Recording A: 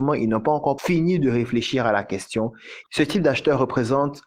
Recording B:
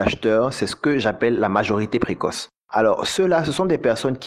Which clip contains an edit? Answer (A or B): A